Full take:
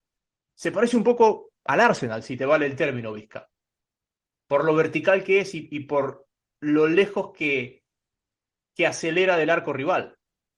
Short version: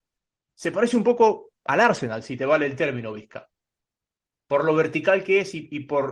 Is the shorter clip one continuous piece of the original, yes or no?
yes